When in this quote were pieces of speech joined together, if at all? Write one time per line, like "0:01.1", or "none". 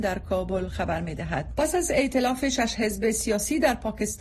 0:01.5